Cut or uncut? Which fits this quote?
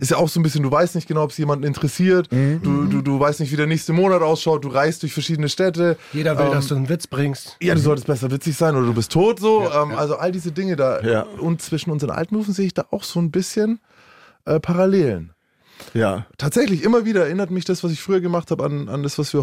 uncut